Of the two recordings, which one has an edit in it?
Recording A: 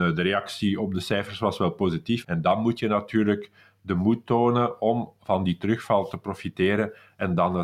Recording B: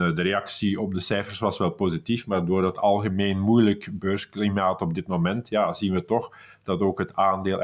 A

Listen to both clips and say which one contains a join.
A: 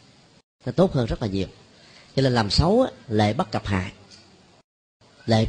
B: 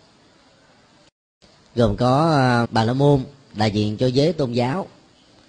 B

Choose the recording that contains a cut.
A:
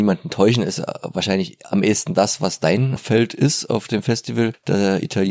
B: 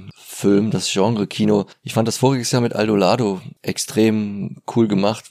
B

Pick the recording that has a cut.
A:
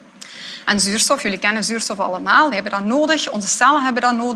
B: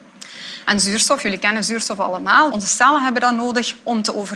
B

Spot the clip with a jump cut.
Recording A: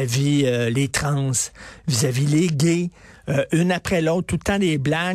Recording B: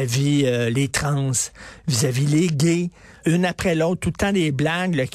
B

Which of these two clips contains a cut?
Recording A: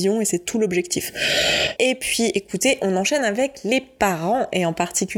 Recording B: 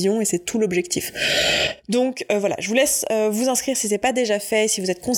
A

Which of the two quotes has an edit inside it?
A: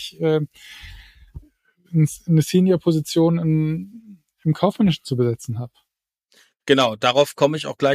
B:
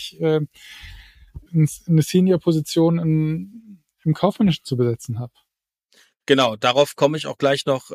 B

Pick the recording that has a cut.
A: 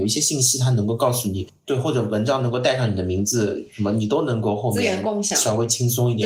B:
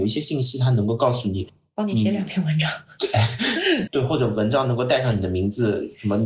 A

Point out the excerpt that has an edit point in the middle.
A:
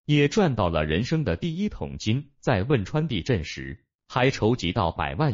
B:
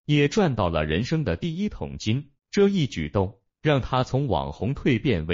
B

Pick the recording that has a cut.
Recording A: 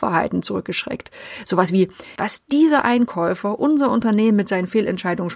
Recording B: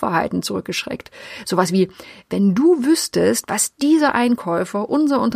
A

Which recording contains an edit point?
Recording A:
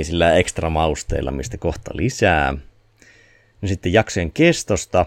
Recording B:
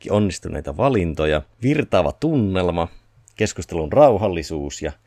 B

